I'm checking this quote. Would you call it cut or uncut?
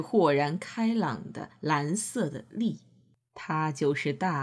uncut